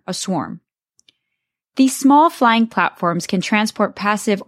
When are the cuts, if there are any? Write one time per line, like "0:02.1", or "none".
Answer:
none